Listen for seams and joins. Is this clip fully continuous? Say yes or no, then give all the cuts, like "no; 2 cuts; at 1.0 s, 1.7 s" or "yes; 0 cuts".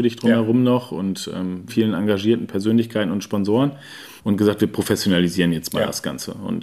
no; 2 cuts; at 1.7 s, 4.2 s